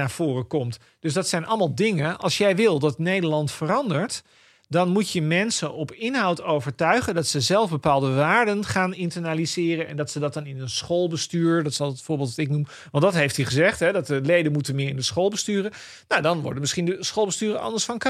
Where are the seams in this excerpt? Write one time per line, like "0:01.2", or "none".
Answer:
none